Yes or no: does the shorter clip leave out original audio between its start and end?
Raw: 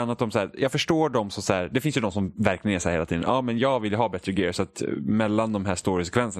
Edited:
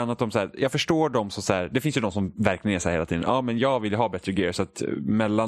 no